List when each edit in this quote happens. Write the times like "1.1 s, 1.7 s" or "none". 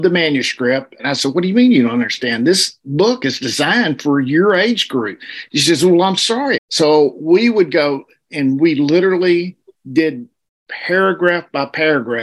1.0 s, 6.6 s